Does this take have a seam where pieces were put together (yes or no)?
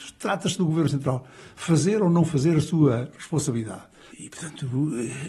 yes